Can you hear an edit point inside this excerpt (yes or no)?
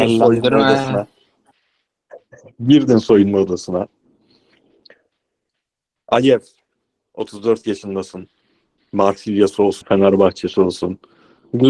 yes